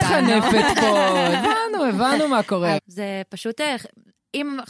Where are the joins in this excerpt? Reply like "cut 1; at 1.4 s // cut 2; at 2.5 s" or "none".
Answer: cut 1; at 2.8 s